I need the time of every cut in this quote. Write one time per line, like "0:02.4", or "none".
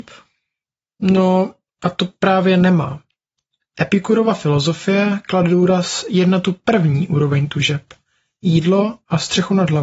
none